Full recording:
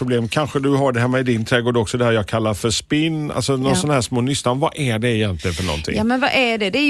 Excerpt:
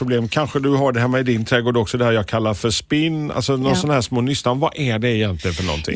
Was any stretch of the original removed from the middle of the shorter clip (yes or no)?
no